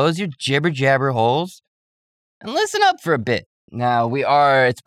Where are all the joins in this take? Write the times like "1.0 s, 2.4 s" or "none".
none